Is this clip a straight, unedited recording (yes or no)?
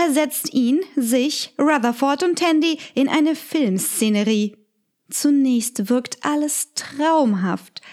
no